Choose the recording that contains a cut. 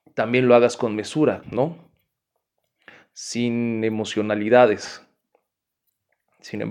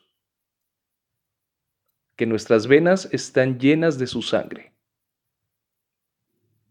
first; 1 cut; at 1.4 s

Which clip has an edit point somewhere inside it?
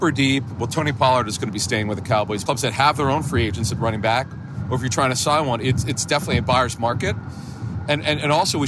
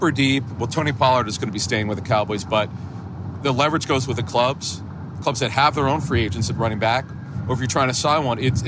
first; 1 cut; at 2.5 s

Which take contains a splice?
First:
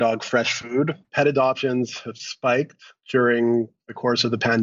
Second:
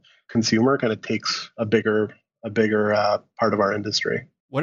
first; 1 cut; at 1.0 s

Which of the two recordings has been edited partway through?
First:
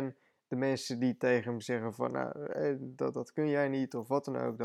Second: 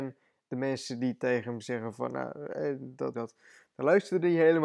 second; 1 cut; at 3.1 s

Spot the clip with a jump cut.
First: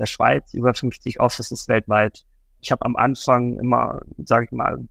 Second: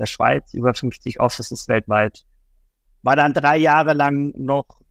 first; 1 cut; at 2.6 s

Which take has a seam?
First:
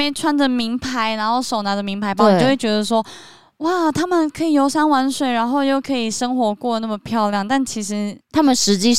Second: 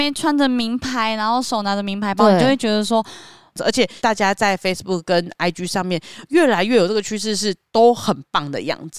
second; 1 cut; at 3.6 s

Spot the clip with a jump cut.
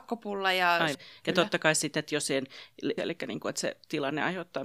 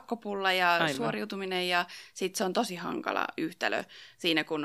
first; 2 cuts; at 0.9 s, 3.0 s

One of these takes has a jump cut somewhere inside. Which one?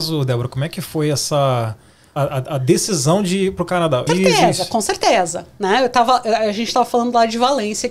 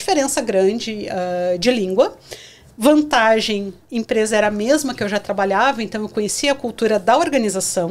first; 2 cuts; at 2.2 s, 4.1 s

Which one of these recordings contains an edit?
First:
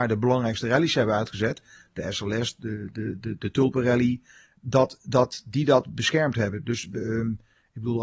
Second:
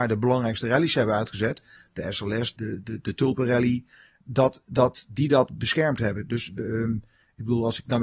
second; 1 cut; at 2.6 s

